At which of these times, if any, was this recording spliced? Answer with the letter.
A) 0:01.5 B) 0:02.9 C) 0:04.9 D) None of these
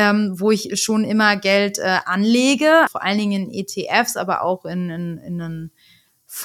B